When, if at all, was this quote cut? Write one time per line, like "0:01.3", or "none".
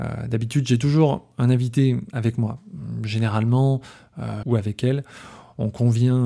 0:04.4

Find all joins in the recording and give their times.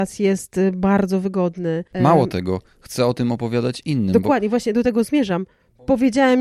0:01.9

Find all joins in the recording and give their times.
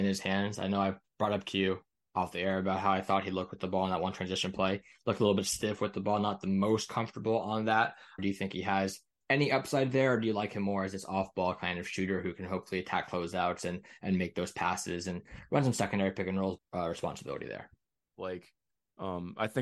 0:08.2
0:16.6
0:18.1

